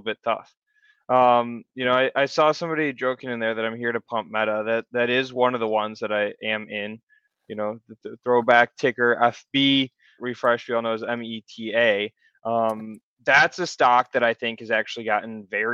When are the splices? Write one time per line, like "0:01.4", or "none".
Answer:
0:10.2